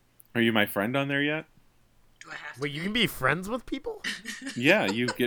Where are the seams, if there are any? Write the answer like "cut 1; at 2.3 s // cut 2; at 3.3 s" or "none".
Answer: none